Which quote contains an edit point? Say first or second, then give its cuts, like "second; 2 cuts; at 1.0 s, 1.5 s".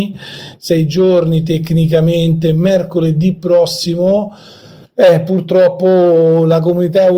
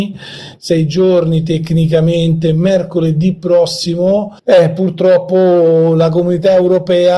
second; 1 cut; at 4.4 s